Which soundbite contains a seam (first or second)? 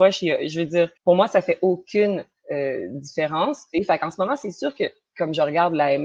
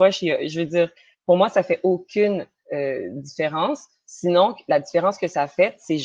first